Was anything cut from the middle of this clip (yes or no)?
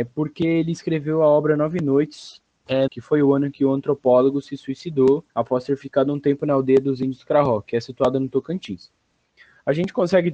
yes